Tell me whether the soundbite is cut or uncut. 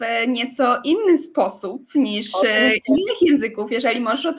uncut